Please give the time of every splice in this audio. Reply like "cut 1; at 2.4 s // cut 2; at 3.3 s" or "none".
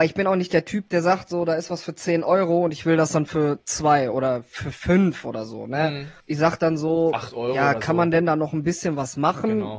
cut 1; at 6.2 s